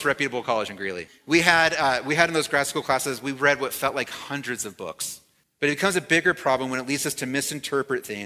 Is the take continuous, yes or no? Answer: no